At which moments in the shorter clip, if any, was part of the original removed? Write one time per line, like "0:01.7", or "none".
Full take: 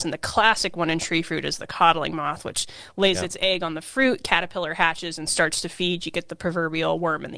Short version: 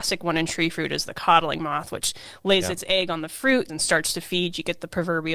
0:03.7